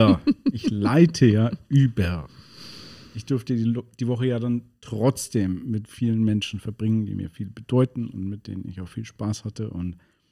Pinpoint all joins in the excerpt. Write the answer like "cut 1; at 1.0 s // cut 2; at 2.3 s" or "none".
none

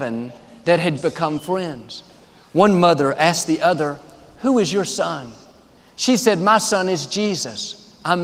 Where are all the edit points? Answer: cut 1; at 1.0 s

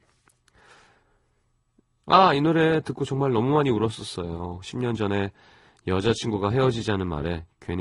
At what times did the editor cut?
cut 1; at 2.0 s

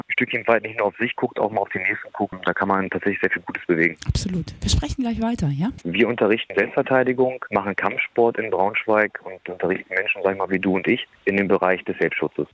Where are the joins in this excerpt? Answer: cut 1; at 5.8 s

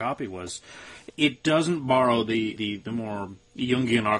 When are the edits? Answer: cut 1; at 2.6 s

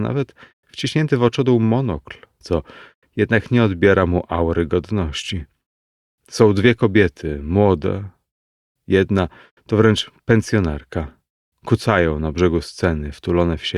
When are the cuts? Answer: cut 1; at 2.4 s

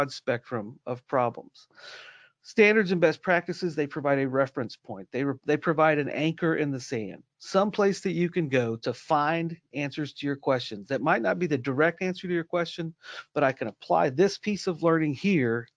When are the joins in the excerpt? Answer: none

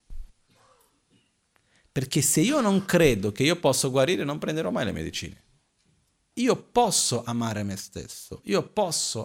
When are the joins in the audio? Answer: cut 1; at 6.3 s

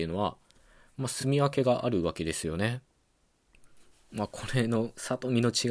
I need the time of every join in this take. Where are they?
none

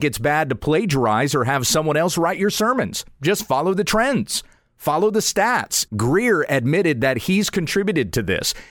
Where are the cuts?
cut 1; at 5.9 s

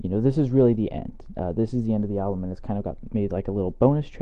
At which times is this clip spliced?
none

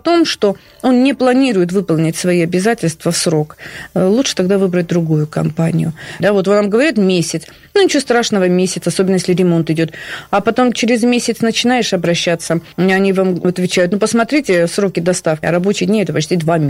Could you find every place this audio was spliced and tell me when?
cut 1; at 6.2 s // cut 2; at 15.4 s

